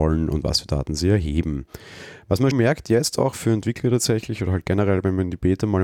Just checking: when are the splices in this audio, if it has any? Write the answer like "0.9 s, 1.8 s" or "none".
2.5 s